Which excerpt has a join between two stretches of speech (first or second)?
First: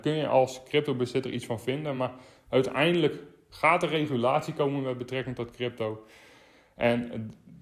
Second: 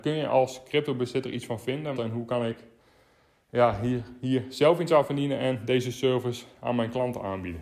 second